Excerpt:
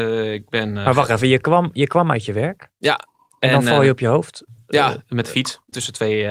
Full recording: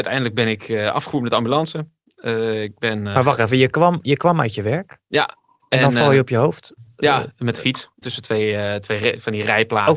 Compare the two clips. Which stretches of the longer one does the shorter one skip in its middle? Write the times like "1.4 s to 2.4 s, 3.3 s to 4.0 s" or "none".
none